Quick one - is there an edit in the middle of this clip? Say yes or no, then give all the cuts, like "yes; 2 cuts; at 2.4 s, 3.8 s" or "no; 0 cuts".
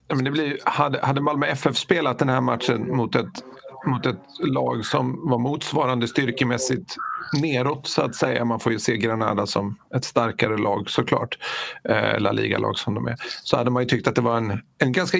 no; 0 cuts